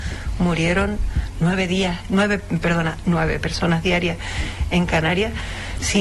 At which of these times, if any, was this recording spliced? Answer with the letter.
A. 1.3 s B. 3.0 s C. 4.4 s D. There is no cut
B